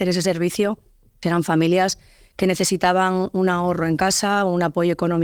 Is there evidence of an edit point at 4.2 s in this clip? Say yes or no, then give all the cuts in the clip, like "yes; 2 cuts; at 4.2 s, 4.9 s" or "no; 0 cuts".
no; 1 cut; at 1.2 s